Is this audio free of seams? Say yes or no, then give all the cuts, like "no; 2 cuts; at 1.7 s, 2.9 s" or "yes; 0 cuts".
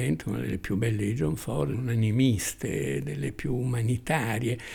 no; 1 cut; at 1.7 s